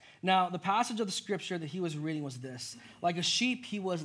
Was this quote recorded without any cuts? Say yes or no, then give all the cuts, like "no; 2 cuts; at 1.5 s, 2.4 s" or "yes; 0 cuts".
yes; 0 cuts